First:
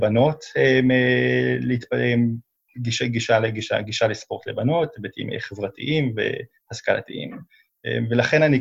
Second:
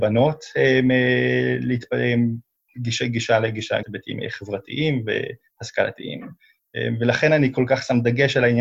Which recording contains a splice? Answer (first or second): second